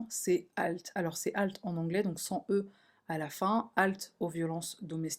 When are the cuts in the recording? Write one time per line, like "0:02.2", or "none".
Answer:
none